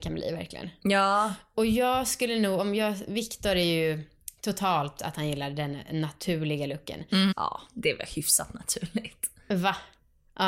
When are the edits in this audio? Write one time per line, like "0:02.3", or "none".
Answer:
0:07.3